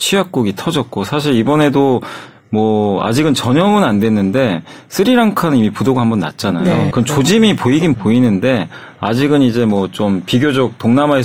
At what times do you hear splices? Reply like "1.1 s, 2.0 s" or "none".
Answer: 6.9 s, 7.9 s